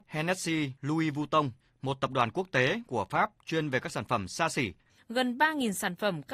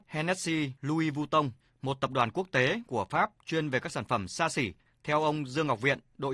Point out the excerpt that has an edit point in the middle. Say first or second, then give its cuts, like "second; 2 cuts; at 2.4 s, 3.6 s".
first; 1 cut; at 4.9 s